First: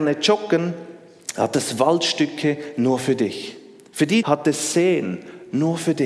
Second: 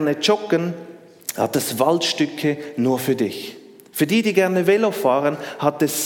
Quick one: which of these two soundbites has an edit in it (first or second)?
first